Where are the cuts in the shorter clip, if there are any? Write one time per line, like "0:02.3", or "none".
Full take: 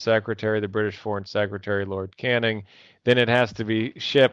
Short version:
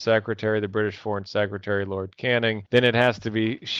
0:02.7